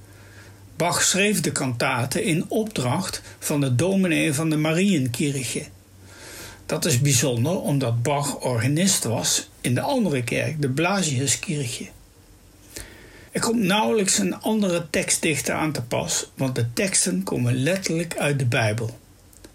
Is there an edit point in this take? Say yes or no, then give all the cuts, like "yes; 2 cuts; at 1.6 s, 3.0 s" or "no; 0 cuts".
yes; 1 cut; at 13.3 s